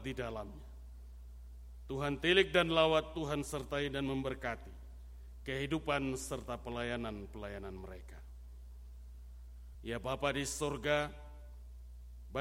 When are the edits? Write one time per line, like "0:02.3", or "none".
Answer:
0:09.7